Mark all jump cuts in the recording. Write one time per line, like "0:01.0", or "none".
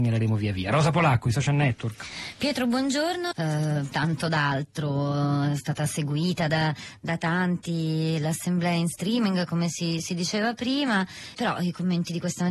0:03.3
0:11.3